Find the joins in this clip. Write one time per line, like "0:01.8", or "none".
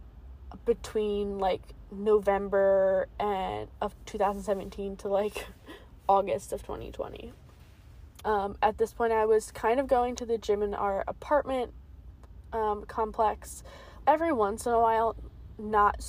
0:08.2
0:14.0